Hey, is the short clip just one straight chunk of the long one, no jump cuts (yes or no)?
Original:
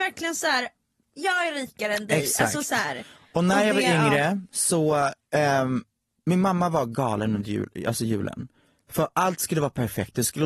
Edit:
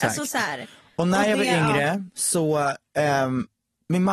yes